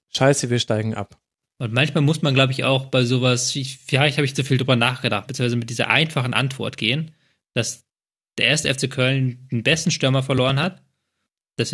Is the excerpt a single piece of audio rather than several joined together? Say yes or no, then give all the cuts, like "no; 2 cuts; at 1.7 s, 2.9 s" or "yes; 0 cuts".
no; 2 cuts; at 1.4 s, 5.3 s